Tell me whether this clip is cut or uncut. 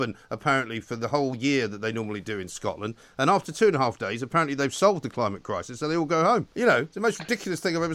cut